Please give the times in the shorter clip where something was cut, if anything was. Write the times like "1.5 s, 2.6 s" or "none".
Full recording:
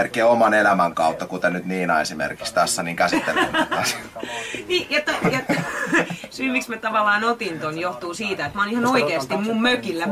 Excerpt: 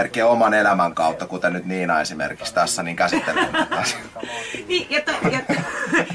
none